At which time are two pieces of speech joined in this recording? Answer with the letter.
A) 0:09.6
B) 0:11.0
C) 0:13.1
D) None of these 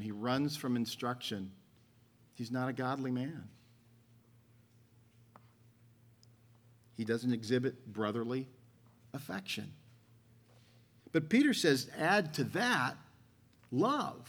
B